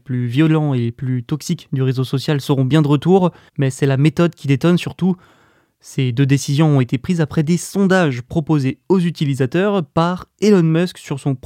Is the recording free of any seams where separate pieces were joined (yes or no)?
no